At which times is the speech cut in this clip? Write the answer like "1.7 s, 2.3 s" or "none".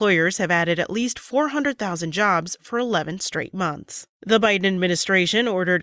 4.1 s